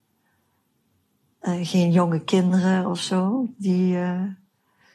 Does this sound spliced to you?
no; 0 cuts

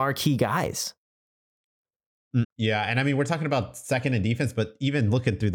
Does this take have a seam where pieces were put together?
yes; 1 cut; at 2.4 s

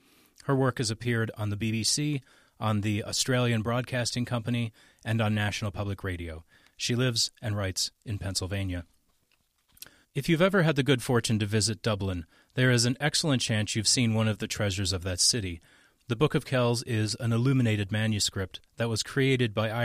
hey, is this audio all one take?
no; 1 cut; at 10.0 s

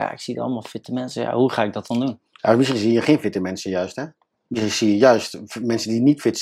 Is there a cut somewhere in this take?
yes; 1 cut; at 4.3 s

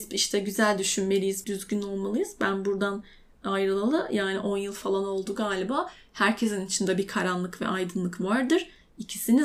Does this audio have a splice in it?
yes; 1 cut; at 1.4 s

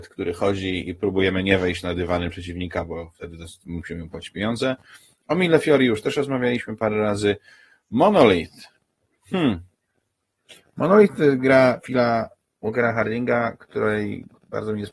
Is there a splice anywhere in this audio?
no; 0 cuts

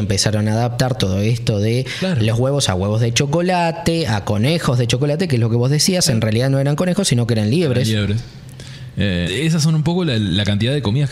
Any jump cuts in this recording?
yes; 1 cut; at 9.3 s

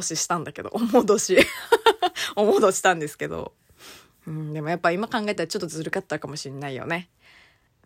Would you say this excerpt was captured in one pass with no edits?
no; 1 cut; at 2.7 s

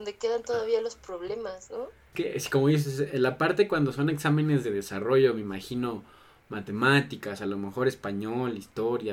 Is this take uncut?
yes; 0 cuts

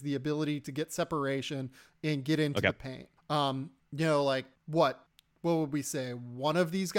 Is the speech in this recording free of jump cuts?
yes; 0 cuts

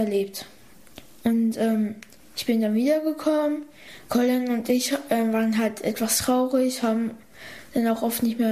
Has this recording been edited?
no; 0 cuts

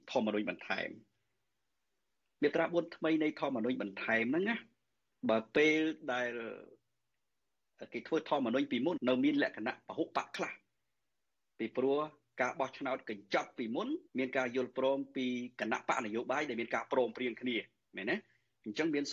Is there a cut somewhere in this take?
yes; 2 cuts; at 9.0 s, 14.1 s

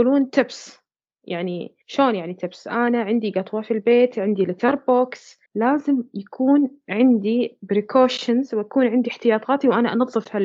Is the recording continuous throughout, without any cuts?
no; 2 cuts; at 1.8 s, 5.5 s

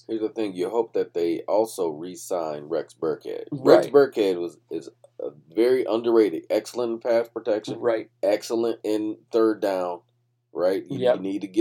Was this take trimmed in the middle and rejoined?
no; 0 cuts

